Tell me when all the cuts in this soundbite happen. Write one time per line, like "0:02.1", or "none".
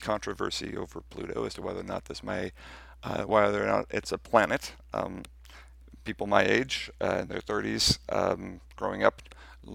none